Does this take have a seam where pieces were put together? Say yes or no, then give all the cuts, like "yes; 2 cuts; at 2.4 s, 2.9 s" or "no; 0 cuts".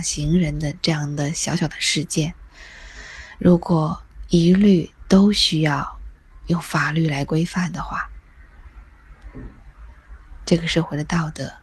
no; 0 cuts